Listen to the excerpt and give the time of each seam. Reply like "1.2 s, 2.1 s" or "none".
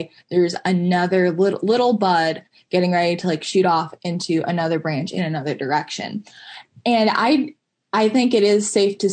none